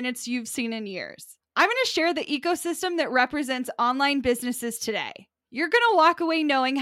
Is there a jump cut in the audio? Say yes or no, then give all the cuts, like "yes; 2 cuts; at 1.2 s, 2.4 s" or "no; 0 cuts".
no; 0 cuts